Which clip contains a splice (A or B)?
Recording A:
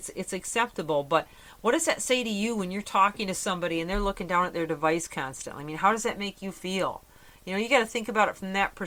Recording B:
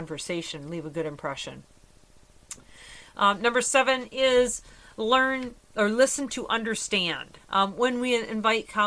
B